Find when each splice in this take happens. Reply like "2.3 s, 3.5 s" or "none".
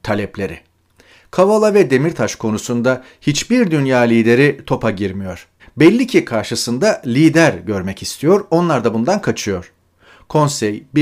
5.6 s